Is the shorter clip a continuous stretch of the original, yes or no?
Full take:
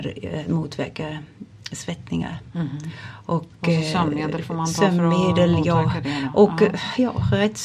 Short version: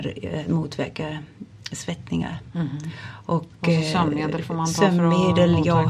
yes